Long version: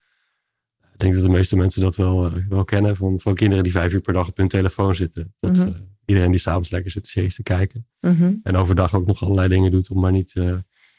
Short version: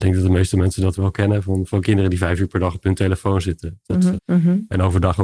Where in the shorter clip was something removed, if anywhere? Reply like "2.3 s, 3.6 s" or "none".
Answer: 1.0 s, 4.2 s

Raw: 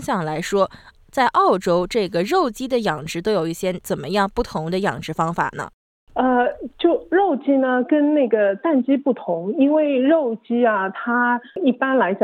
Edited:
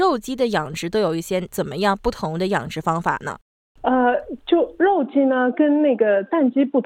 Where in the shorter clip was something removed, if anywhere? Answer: none

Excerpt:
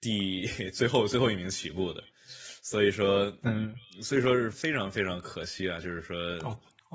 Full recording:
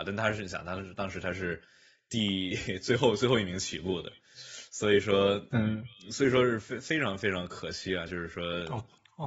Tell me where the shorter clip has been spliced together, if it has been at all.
4.5 s

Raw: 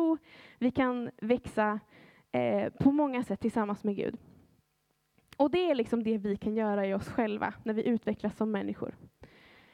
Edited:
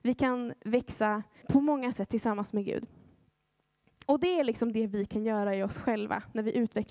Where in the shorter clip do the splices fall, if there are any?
1.4 s

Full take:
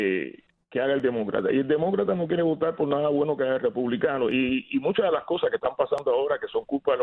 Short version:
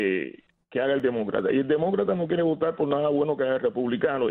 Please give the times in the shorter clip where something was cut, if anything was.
none

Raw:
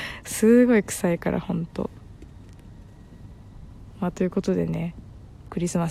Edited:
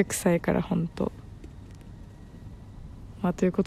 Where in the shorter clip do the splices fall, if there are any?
none

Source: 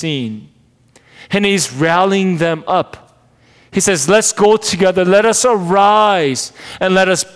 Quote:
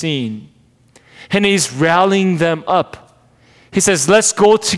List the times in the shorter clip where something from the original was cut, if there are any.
none

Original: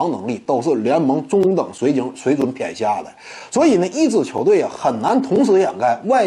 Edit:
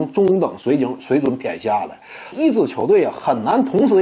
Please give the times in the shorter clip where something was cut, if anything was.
2.3 s

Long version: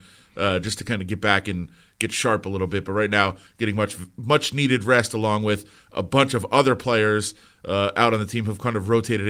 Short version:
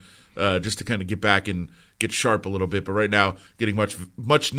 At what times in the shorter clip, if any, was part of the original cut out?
none

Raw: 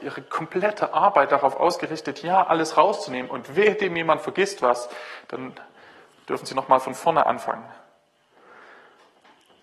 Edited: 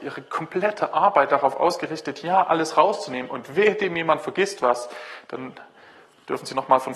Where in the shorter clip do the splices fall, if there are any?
none

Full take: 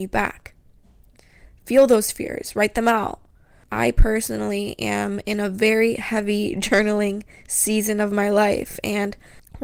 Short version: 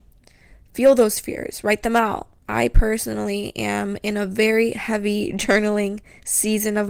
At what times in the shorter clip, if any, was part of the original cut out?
2.4 s

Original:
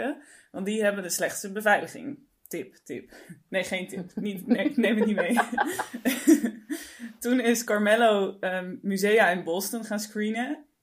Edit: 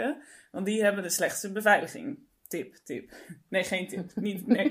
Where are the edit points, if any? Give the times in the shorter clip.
none

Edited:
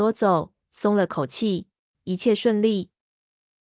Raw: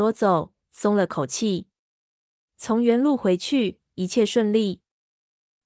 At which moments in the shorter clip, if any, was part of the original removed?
1.9 s

